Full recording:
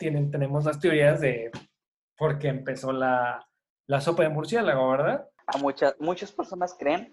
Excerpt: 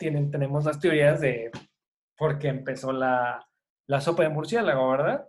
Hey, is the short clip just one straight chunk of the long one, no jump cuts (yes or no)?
yes